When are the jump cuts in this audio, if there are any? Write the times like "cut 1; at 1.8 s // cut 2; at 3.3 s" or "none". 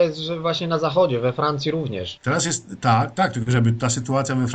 cut 1; at 2.2 s